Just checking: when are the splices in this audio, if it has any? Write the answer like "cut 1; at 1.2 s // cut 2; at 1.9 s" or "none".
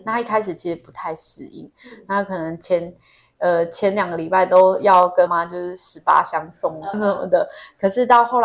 cut 1; at 5.3 s // cut 2; at 6.9 s